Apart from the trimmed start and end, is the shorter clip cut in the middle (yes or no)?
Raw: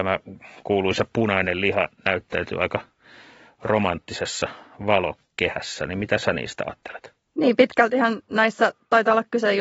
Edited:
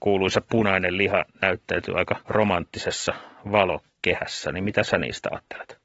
yes